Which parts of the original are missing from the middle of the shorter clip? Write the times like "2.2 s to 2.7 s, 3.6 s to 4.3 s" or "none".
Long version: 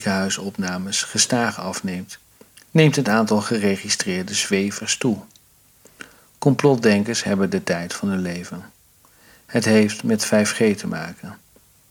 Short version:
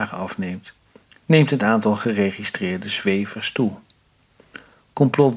none